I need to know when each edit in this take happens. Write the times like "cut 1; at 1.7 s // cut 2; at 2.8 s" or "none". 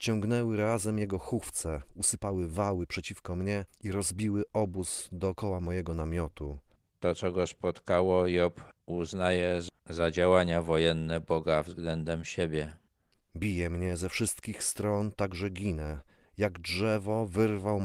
cut 1; at 13.2 s